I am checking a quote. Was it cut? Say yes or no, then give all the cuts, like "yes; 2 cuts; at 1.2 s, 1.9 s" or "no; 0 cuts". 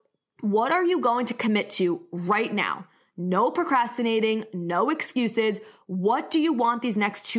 no; 0 cuts